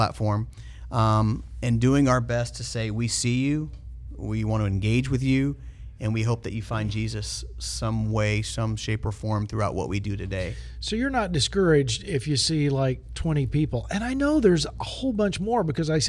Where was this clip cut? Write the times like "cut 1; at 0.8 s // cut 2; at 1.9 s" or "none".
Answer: none